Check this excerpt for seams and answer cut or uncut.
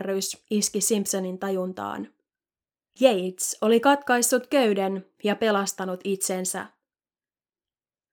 uncut